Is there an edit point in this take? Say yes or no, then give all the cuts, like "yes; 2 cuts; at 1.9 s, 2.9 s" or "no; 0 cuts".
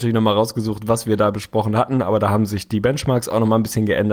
no; 0 cuts